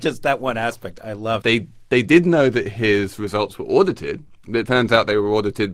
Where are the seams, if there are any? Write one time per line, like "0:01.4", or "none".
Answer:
0:01.4